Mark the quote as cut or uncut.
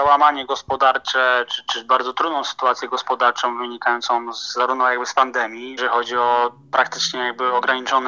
cut